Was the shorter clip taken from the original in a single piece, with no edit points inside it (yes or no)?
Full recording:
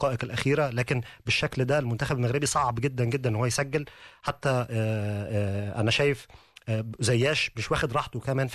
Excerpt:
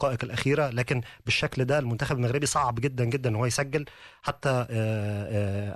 yes